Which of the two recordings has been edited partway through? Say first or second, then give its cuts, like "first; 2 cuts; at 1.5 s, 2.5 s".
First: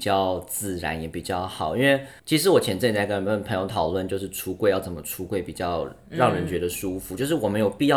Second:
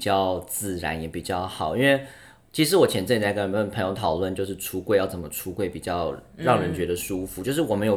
first; 1 cut; at 2.2 s